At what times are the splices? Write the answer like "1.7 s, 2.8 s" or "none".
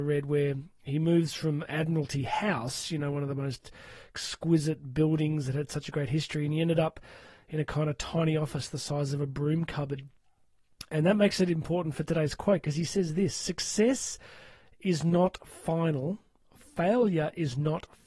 none